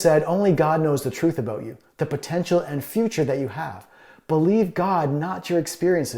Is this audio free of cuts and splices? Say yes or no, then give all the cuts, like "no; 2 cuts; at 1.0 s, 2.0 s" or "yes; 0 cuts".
yes; 0 cuts